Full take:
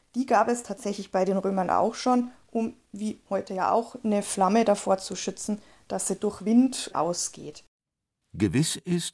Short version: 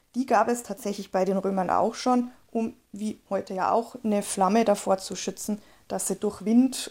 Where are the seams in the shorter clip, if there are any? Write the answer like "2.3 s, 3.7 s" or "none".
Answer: none